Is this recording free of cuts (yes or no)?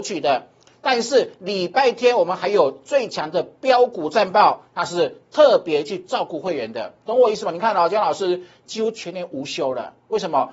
yes